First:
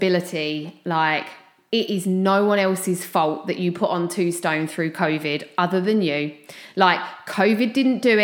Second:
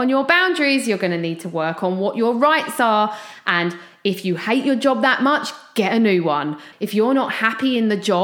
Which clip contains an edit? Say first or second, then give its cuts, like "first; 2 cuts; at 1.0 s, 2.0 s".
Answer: second; 1 cut; at 6.7 s